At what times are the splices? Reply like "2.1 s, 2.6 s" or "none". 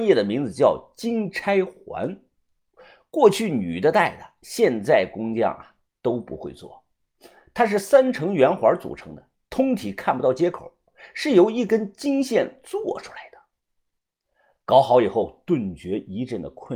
none